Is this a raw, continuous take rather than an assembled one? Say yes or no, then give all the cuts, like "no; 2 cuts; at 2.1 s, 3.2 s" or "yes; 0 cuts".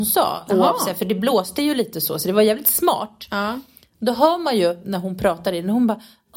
yes; 0 cuts